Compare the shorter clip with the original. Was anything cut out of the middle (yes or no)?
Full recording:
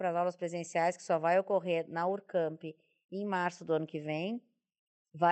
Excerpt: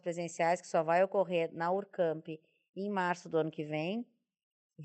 no